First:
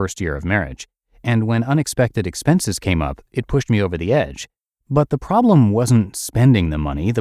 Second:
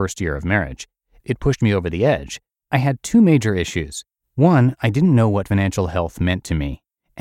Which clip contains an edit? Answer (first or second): second